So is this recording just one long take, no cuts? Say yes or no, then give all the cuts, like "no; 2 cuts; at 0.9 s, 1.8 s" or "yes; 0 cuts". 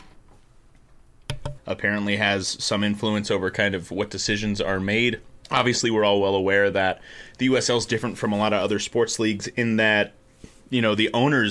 no; 2 cuts; at 1.6 s, 5.4 s